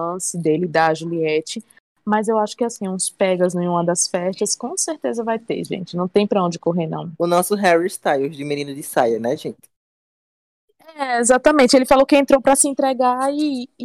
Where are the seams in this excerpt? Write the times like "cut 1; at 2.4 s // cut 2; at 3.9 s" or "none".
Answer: none